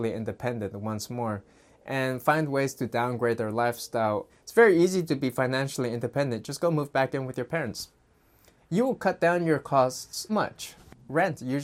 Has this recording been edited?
yes; 2 cuts; at 4.3 s, 10.3 s

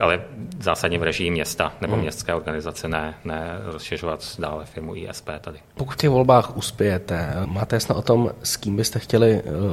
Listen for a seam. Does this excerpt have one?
yes; 2 cuts; at 5.8 s, 7.4 s

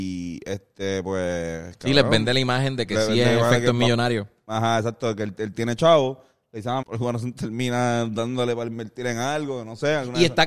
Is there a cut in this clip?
yes; 1 cut; at 6.8 s

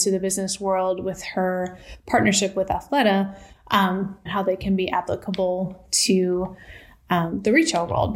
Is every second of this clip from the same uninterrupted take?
no; 1 cut; at 4.3 s

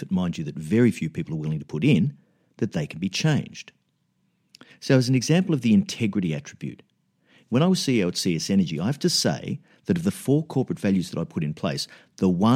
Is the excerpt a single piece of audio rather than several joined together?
yes; 0 cuts

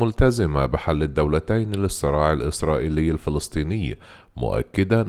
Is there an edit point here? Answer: no; 0 cuts

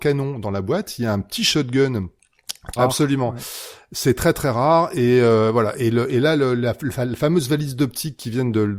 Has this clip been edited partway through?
yes; 1 cut; at 2.8 s

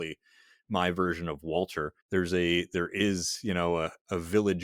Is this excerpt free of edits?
no; 1 cut; at 2.0 s

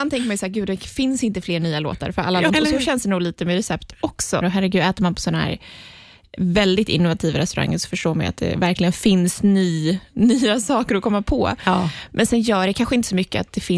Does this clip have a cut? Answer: yes; 2 cuts; at 2.5 s, 4.4 s

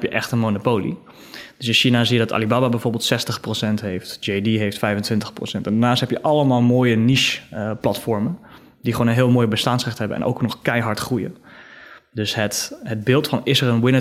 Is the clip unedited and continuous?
yes; 0 cuts

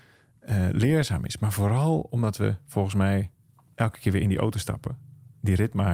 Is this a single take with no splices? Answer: yes; 0 cuts

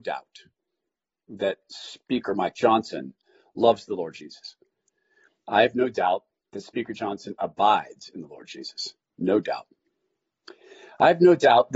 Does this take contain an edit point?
no; 0 cuts

